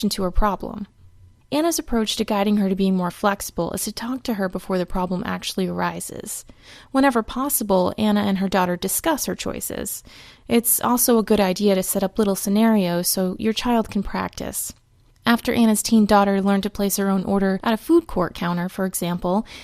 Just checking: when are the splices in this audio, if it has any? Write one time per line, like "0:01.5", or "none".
none